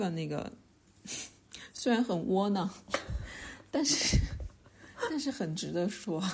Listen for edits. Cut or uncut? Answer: uncut